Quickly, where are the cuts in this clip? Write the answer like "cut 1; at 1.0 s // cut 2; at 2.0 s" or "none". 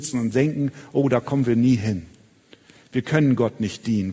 none

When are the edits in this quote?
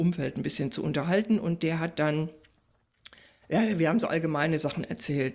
none

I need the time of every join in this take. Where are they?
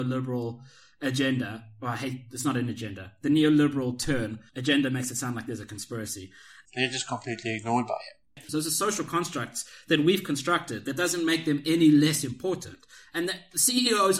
cut 1; at 4.5 s // cut 2; at 6.7 s // cut 3; at 8.5 s

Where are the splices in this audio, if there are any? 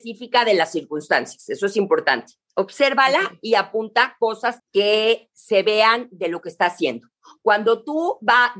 cut 1; at 2.4 s // cut 2; at 4.6 s

